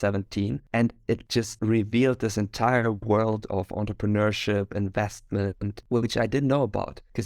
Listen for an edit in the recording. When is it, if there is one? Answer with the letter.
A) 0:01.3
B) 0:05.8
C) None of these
B